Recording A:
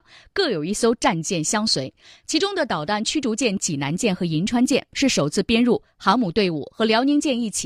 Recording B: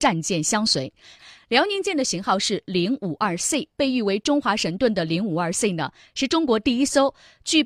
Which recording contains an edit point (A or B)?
B